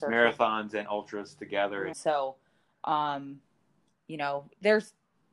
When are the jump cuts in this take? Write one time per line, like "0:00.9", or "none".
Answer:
0:01.9